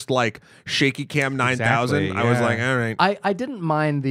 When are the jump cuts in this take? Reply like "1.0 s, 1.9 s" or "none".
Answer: none